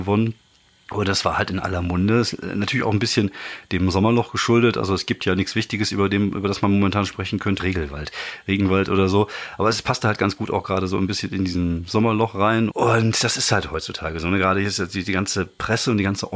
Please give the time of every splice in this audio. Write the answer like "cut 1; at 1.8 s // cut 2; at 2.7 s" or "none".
cut 1; at 7.6 s // cut 2; at 12.7 s